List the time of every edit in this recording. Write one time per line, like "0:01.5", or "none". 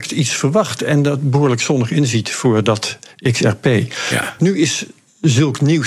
0:04.4